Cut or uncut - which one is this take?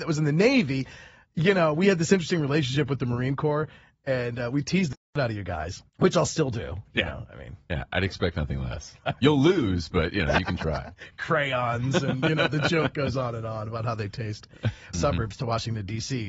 cut